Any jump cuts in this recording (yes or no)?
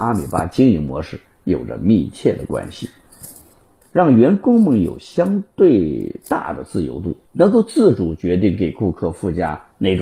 yes